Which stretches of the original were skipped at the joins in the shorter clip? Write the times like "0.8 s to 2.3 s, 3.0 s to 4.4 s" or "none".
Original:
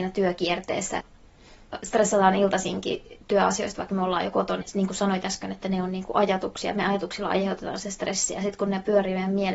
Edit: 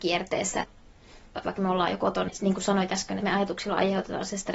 1.8 s to 3.8 s, 5.5 s to 6.7 s